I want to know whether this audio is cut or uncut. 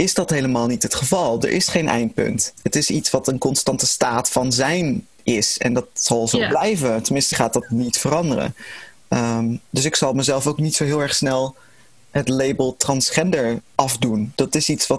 cut